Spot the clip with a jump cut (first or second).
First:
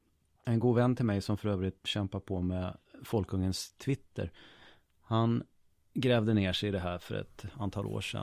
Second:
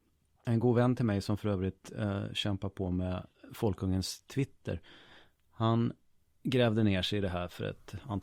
first